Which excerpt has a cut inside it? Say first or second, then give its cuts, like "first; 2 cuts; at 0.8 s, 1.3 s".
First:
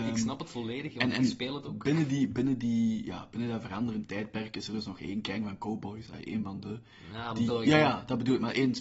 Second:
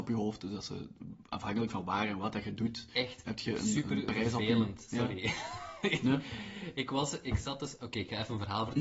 first; 1 cut; at 7.5 s